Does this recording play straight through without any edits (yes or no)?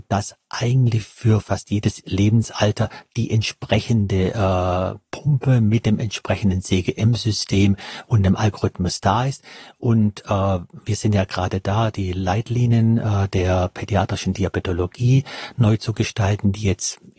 yes